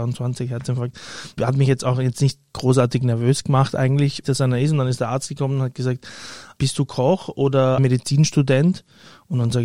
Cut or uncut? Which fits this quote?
cut